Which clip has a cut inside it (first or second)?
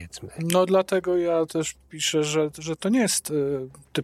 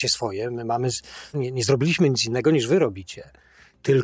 second